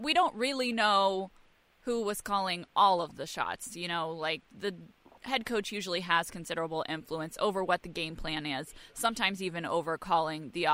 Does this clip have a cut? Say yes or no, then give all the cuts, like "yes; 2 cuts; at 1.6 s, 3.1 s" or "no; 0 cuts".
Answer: no; 0 cuts